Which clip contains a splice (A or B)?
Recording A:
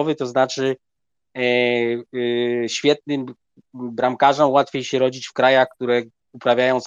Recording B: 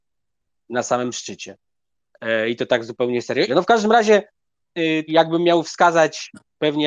B